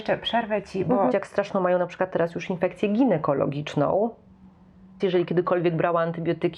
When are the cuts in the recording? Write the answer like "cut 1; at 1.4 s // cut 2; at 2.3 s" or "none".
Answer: cut 1; at 1.1 s // cut 2; at 5.0 s